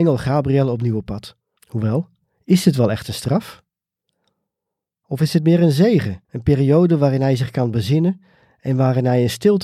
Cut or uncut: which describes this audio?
cut